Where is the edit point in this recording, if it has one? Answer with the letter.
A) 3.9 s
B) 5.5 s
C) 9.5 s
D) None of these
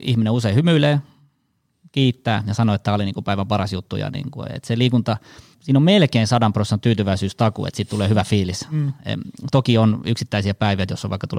B